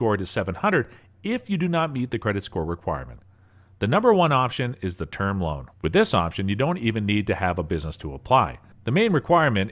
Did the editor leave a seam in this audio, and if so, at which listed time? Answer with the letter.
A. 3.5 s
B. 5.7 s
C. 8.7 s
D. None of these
B